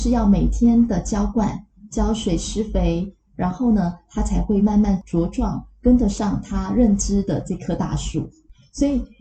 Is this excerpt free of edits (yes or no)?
yes